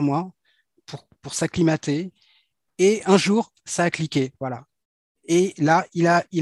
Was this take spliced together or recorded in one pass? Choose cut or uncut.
uncut